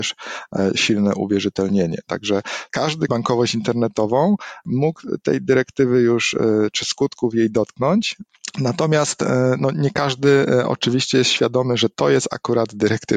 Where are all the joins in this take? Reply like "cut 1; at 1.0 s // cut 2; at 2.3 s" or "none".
cut 1; at 3.1 s